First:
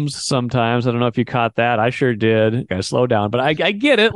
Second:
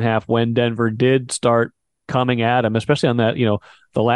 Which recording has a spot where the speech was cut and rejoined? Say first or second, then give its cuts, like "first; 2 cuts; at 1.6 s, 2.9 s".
first; 1 cut; at 2.7 s